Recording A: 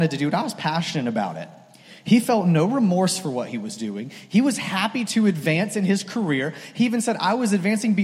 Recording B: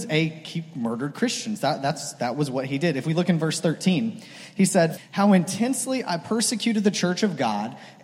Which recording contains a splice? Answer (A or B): B